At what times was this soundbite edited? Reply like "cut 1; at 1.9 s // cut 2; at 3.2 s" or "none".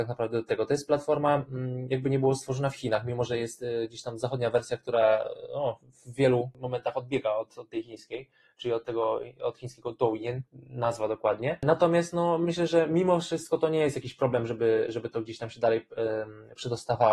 cut 1; at 10.4 s

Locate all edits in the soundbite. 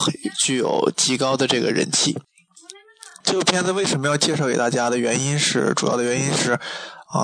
none

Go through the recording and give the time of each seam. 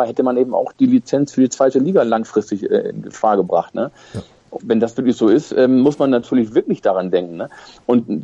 cut 1; at 4.6 s

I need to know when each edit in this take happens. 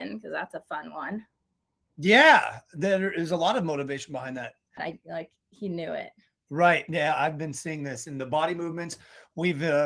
cut 1; at 4.8 s

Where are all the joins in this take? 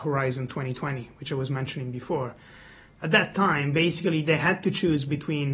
none

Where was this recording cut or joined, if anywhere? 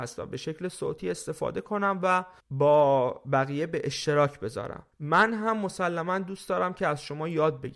cut 1; at 2.4 s // cut 2; at 4.9 s

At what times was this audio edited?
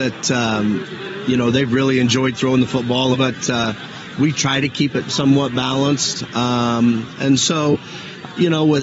cut 1; at 3.1 s

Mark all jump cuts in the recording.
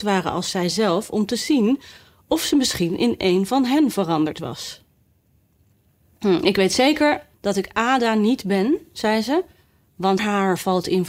cut 1; at 7.3 s // cut 2; at 10.2 s

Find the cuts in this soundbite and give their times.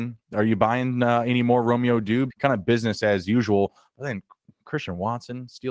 cut 1; at 2.3 s

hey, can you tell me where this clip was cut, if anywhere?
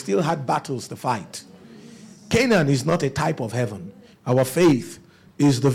cut 1; at 4.1 s

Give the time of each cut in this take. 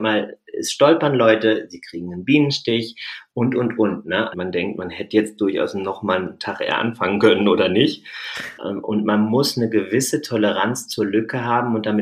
cut 1; at 4.3 s // cut 2; at 8.6 s

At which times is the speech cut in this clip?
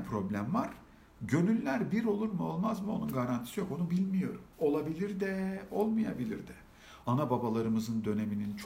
cut 1; at 4.5 s // cut 2; at 7.0 s

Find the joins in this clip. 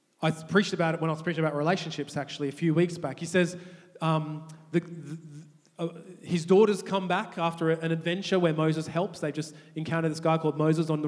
none

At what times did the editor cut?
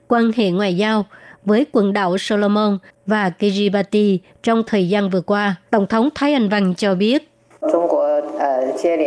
cut 1; at 5.7 s

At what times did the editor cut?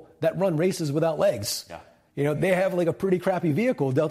cut 1; at 2.3 s

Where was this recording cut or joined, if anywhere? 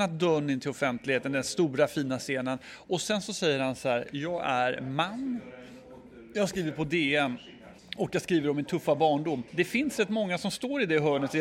cut 1; at 7.8 s // cut 2; at 9.5 s

